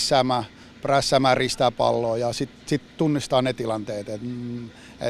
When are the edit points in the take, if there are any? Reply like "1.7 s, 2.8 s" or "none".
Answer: none